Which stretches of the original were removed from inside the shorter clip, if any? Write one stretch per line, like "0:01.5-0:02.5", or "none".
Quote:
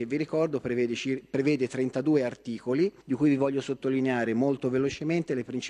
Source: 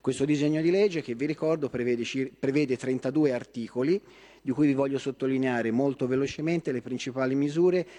0:04.1-0:04.4